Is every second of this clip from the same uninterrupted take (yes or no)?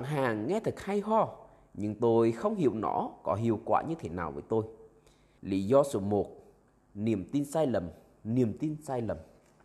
no